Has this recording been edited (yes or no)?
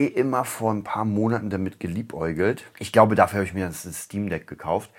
yes